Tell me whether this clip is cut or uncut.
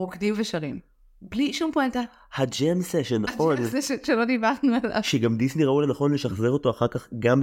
uncut